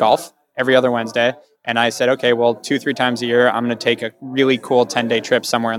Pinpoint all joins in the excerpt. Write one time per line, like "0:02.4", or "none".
none